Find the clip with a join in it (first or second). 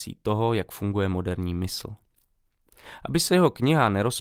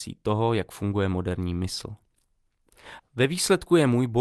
second